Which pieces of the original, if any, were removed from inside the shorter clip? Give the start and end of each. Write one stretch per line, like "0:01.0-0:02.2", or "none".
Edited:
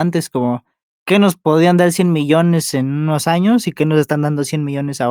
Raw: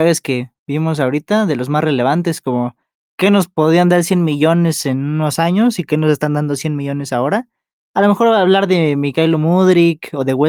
none

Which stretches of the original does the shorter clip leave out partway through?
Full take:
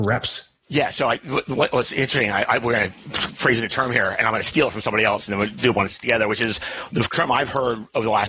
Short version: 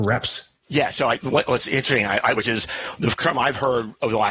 0:01.2-0:01.4
0:02.6-0:06.3

